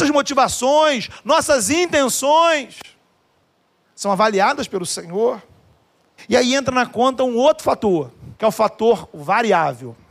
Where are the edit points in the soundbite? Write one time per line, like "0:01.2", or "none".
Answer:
0:06.2
0:08.4